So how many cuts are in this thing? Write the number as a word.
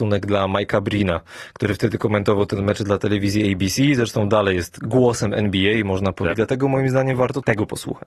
one